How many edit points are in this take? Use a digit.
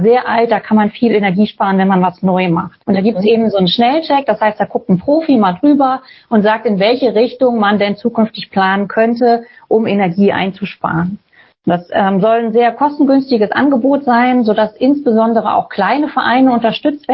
1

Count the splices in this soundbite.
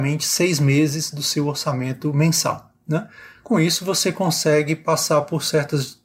0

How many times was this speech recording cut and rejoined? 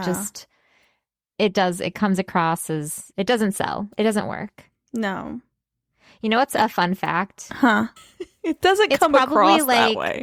1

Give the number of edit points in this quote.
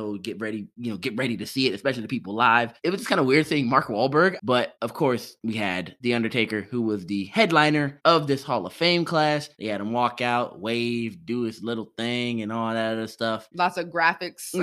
1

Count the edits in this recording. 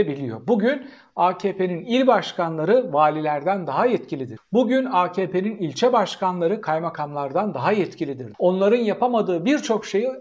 1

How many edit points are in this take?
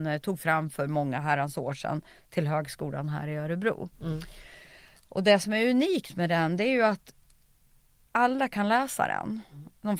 0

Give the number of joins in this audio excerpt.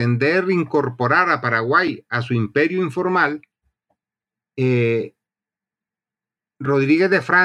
0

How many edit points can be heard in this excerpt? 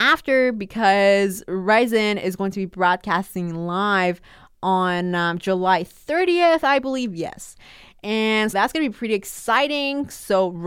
1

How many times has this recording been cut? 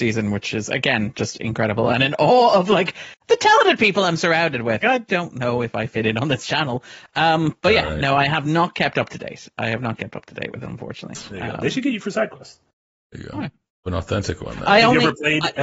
1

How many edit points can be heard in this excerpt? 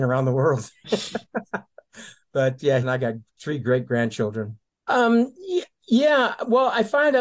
2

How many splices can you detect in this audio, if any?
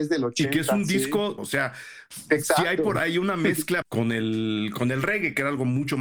2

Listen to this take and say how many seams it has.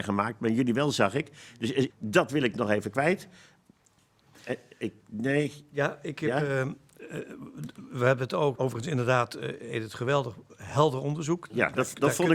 2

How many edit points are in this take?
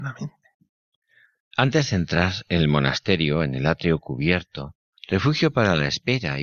1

